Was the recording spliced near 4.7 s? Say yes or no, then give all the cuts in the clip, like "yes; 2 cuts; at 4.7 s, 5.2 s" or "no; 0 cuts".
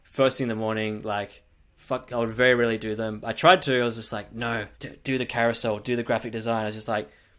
yes; 2 cuts; at 2.1 s, 4.7 s